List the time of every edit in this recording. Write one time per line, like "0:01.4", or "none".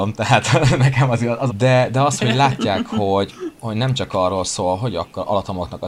0:01.5